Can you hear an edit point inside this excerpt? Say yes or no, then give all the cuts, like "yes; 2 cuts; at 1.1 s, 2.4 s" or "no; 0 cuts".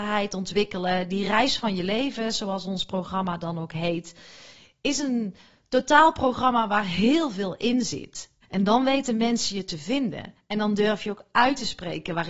yes; 1 cut; at 8.4 s